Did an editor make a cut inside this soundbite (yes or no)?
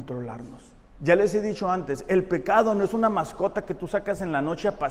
no